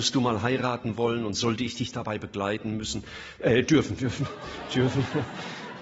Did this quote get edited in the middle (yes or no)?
no